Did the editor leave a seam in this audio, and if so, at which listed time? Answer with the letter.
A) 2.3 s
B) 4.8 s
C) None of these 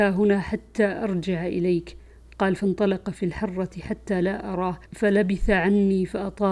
B